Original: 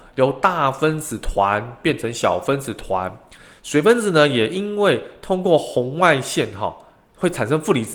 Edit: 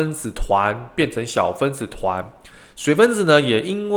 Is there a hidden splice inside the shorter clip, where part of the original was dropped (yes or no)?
no